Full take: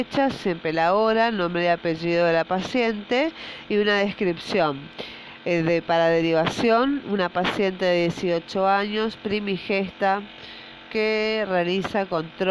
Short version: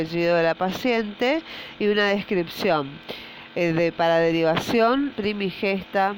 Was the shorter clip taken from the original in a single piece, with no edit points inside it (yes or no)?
no